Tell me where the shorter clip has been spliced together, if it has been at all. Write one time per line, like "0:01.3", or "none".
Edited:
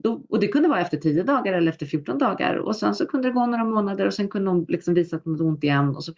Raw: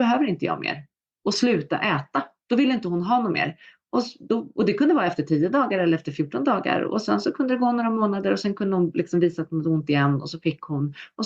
none